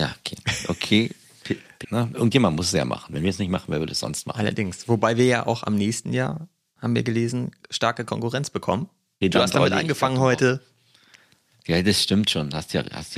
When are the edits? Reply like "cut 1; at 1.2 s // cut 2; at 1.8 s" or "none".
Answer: cut 1; at 1.8 s // cut 2; at 9.2 s